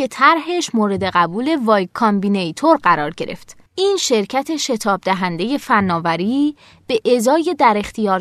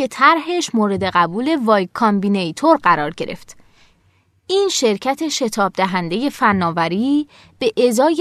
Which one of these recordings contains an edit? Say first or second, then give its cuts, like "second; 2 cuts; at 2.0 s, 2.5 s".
first; 1 cut; at 3.7 s